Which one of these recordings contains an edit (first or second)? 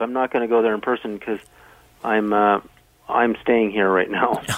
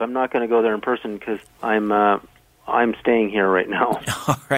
second